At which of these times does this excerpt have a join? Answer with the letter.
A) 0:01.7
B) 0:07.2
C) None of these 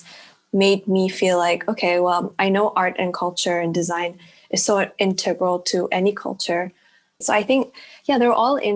B